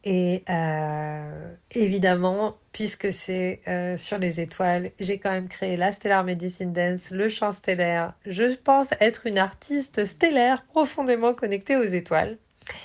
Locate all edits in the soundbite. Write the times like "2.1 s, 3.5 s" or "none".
none